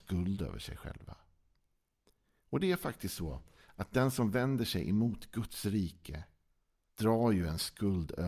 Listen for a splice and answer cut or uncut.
cut